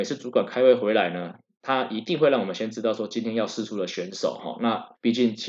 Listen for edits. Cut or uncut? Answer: uncut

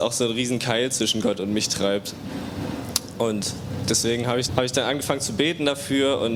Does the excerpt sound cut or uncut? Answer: cut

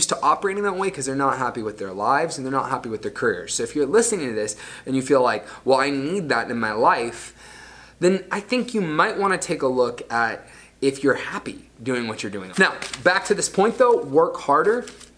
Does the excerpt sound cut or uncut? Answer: cut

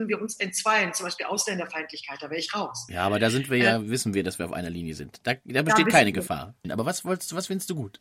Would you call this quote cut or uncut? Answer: cut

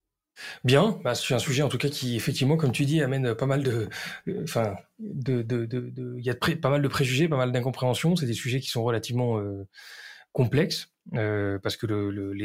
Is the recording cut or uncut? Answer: uncut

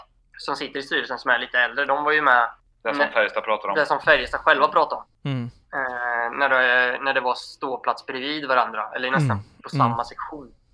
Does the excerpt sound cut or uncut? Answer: uncut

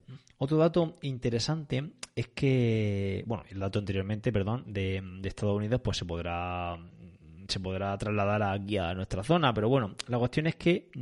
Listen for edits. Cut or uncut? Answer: uncut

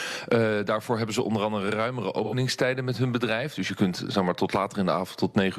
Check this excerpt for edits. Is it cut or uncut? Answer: uncut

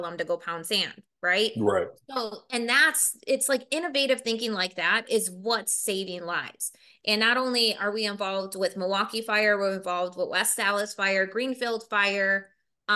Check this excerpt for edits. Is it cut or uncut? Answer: uncut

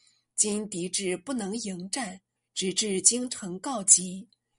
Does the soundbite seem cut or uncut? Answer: cut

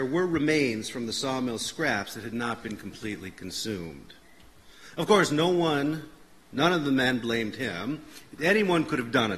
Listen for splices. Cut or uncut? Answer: uncut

